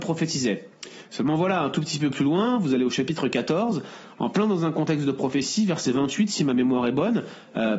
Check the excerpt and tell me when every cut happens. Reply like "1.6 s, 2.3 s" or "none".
none